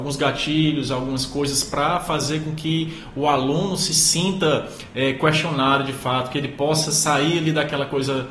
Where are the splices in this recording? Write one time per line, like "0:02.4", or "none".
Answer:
none